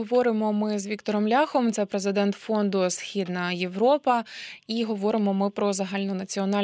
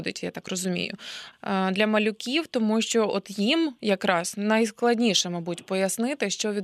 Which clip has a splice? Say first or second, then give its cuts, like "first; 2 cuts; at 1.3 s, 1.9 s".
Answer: second; 1 cut; at 1.3 s